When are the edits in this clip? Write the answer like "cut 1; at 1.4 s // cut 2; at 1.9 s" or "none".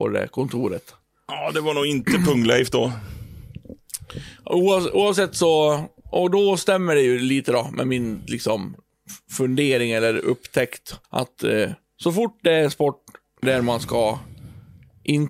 cut 1; at 6.0 s // cut 2; at 11.0 s